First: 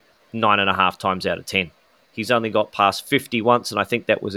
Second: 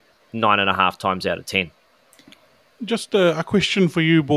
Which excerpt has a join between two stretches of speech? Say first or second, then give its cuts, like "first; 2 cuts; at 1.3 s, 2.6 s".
first; 1 cut; at 2.0 s